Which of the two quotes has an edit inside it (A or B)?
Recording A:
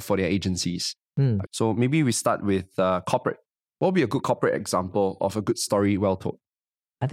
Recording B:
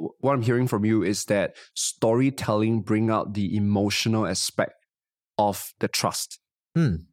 A